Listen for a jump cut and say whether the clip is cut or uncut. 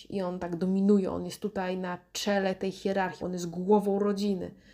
cut